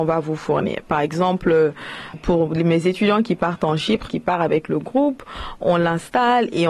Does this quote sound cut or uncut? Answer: cut